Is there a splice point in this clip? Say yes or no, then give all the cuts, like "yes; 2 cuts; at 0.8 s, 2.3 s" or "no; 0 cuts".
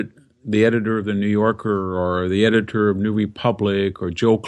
no; 0 cuts